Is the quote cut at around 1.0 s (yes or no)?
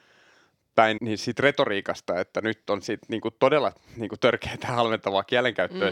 yes